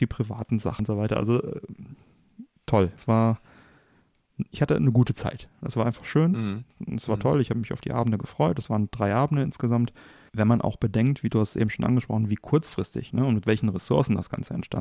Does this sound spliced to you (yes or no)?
no